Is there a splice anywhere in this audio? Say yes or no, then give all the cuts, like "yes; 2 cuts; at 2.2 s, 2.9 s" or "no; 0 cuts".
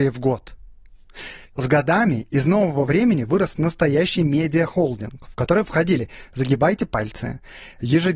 yes; 1 cut; at 1.5 s